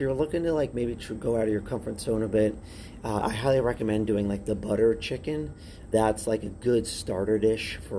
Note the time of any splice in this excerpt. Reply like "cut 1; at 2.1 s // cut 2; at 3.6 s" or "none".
cut 1; at 3.2 s // cut 2; at 5.9 s